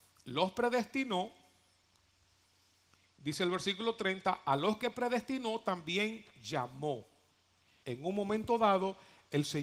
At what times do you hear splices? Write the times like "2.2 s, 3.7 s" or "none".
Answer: 7.8 s